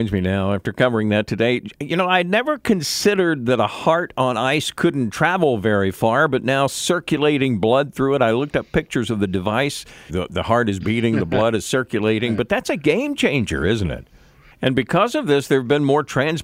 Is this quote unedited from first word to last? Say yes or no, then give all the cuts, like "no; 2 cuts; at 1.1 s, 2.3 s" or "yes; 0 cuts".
no; 2 cuts; at 10.1 s, 14.5 s